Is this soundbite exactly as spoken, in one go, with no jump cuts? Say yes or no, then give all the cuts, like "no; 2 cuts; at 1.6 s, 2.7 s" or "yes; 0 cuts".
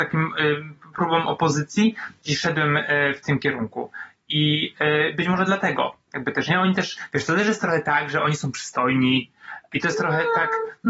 yes; 0 cuts